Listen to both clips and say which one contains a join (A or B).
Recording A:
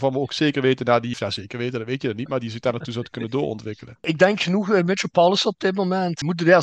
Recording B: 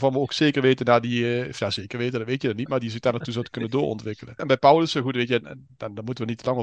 A